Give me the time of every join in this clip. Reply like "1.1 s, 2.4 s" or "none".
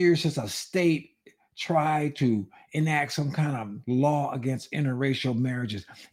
none